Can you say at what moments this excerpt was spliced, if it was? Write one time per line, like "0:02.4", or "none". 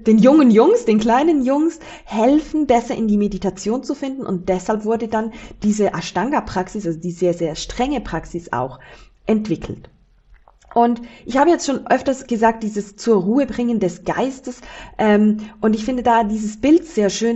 none